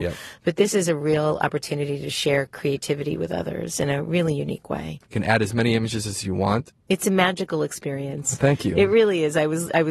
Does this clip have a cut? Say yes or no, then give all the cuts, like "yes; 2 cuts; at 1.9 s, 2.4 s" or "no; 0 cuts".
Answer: yes; 1 cut; at 5.0 s